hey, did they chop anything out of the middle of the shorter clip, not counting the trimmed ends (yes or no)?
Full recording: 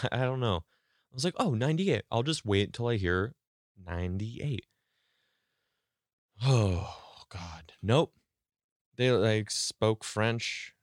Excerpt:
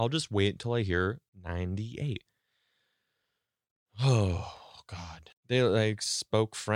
yes